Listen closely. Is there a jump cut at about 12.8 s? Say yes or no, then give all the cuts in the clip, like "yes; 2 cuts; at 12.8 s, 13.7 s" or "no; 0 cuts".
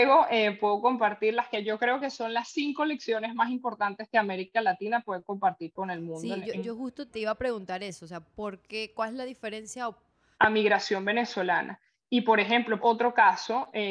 yes; 3 cuts; at 7.1 s, 10.3 s, 12.8 s